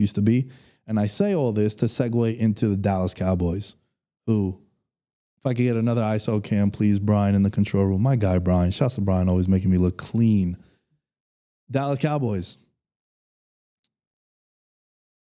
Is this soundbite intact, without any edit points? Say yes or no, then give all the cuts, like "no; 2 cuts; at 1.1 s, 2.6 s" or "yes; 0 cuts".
yes; 0 cuts